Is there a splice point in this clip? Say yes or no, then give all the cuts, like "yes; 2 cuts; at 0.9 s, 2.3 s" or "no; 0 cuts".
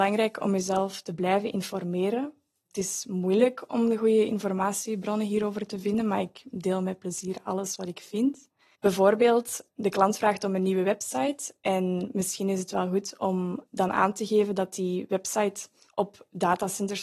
yes; 1 cut; at 8.8 s